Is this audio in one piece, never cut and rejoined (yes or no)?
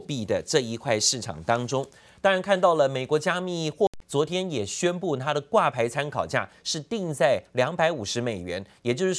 no